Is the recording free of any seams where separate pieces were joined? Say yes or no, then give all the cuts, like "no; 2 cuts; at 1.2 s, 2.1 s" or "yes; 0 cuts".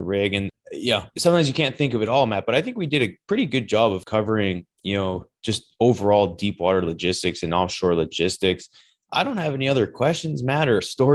yes; 0 cuts